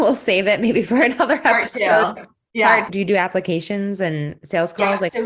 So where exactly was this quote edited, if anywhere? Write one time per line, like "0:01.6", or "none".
0:02.9